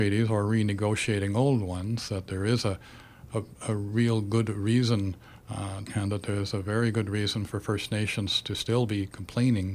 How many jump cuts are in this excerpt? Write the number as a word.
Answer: one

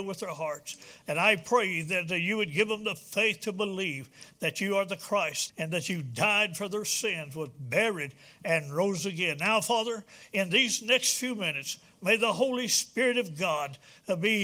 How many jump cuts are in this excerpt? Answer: one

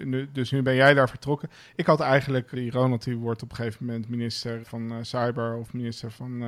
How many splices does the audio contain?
two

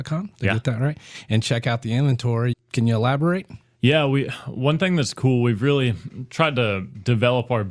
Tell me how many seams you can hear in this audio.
one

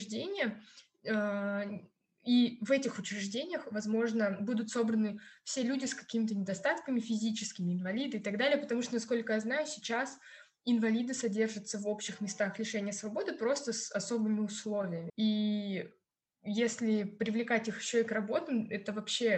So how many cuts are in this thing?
one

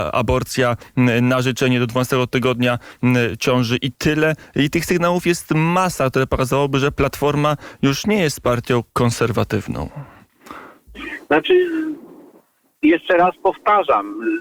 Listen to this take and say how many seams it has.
zero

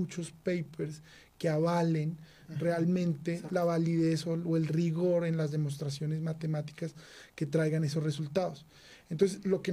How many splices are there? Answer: zero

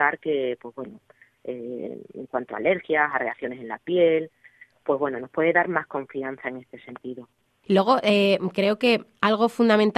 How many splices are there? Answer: one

